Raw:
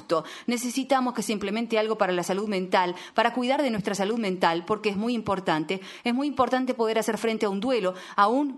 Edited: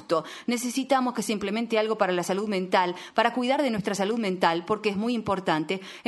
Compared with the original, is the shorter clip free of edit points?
yes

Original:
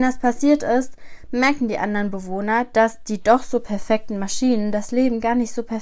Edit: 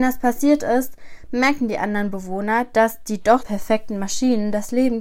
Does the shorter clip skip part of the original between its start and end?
yes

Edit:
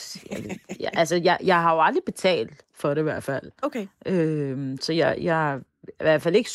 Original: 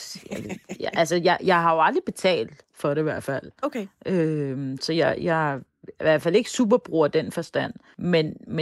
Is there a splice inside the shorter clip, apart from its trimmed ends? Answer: no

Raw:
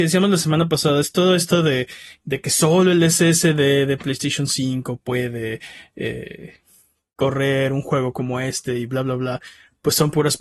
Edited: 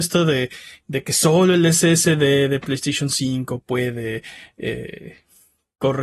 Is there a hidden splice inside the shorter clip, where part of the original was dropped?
no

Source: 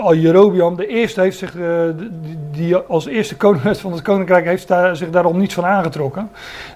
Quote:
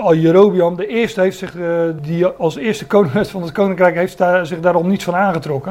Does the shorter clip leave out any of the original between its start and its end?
yes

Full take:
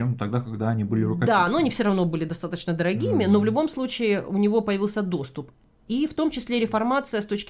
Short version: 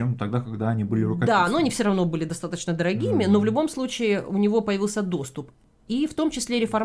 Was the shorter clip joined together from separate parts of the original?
no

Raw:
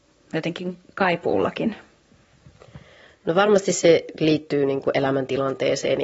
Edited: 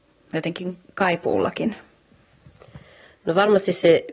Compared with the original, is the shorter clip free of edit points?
yes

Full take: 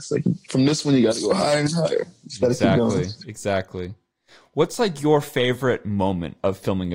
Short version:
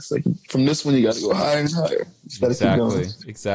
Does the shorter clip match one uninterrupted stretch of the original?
yes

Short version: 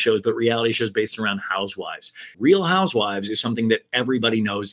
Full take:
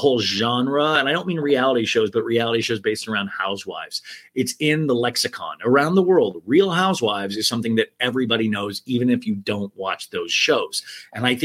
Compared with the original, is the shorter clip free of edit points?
no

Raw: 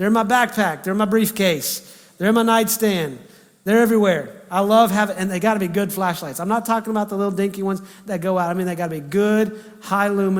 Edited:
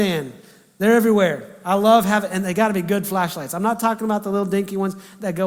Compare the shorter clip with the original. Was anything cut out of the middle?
no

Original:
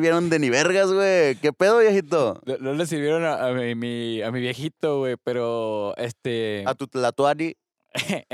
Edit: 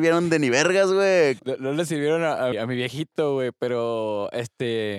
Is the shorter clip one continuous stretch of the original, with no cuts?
no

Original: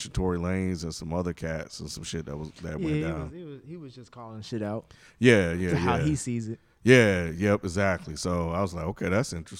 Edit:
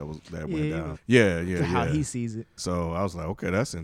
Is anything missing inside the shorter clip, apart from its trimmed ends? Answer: yes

